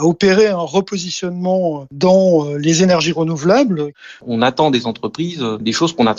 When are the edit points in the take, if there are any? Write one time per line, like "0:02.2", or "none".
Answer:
0:04.2